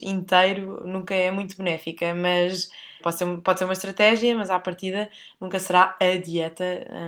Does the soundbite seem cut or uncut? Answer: cut